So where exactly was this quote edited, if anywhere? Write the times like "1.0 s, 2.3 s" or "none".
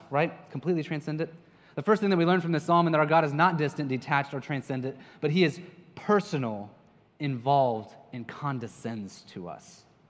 none